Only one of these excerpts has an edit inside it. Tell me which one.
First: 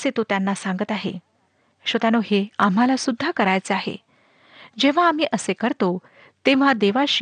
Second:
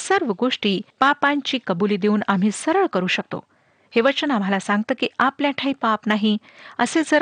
second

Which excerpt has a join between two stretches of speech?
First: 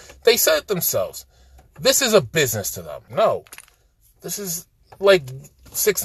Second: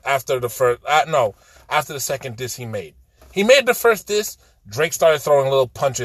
first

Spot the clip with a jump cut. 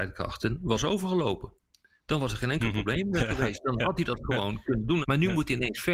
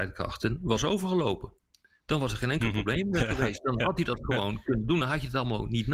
first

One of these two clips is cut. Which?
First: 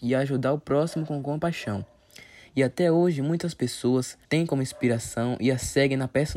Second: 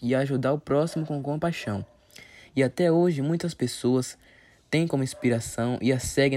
first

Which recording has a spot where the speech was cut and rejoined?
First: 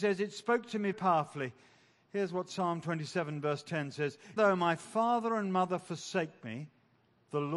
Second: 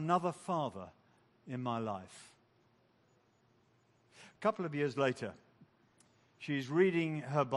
first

